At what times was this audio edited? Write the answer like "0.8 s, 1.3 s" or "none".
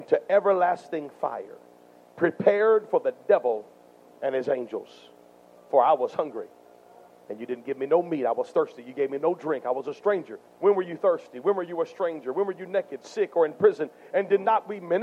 10.5 s